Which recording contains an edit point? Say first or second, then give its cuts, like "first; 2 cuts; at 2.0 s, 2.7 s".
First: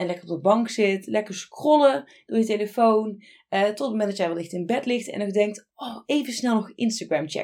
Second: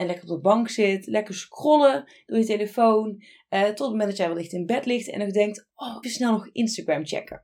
second; 1 cut; at 6.0 s